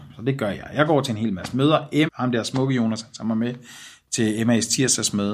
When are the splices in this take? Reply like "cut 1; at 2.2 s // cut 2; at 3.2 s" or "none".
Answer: cut 1; at 2.1 s